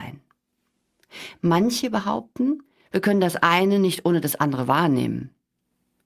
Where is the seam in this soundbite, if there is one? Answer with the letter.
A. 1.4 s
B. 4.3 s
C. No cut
C